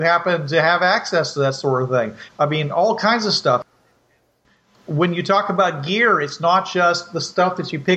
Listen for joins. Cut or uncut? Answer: cut